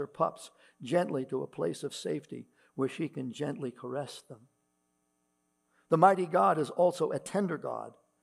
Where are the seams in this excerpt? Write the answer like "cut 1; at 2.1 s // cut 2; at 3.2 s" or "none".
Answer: none